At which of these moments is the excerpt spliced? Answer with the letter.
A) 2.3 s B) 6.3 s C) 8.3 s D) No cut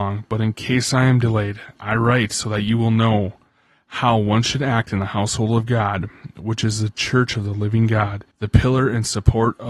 C